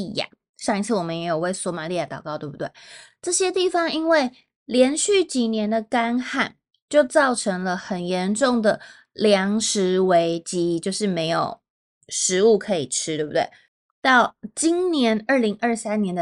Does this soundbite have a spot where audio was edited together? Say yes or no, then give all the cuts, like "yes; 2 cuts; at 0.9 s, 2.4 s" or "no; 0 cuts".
no; 0 cuts